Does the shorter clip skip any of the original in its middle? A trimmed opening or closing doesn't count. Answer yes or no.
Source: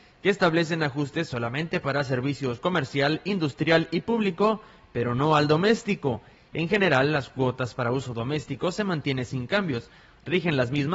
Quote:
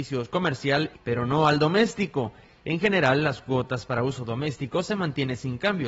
yes